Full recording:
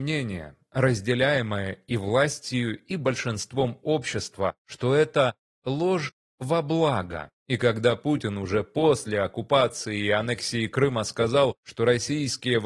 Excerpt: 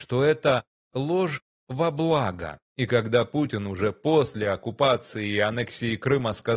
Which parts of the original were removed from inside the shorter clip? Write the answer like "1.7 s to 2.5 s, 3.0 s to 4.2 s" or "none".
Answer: none